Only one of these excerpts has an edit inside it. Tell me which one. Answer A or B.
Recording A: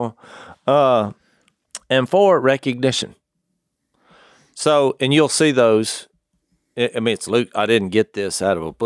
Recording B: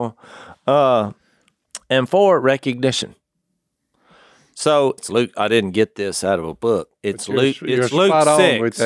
B